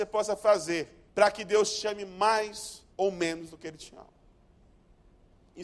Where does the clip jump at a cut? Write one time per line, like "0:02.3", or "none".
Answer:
0:01.1
0:02.9